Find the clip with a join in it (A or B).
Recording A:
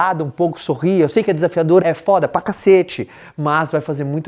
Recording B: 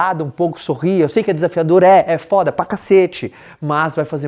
A